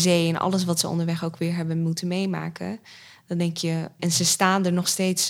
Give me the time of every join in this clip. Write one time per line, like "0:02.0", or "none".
0:04.0